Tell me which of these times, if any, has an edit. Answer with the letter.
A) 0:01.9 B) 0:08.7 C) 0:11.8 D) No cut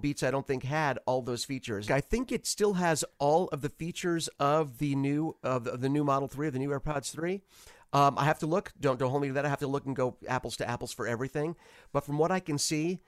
A